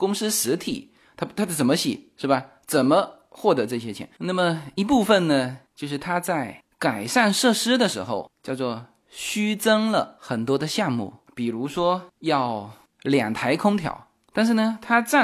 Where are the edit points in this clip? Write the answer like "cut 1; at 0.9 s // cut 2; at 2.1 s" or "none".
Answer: cut 1; at 4.2 s